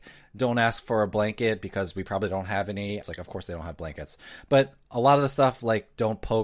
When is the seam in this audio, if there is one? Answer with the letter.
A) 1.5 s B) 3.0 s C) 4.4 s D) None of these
B